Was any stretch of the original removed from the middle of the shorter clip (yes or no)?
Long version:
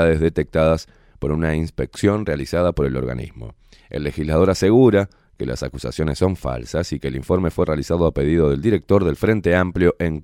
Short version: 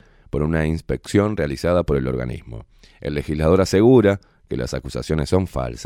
no